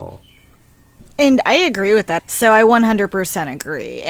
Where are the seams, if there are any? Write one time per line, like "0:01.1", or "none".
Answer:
0:02.2